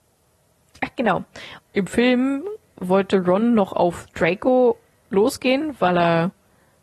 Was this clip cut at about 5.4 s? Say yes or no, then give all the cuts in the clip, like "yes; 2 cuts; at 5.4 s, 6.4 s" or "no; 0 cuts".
no; 1 cut; at 1.6 s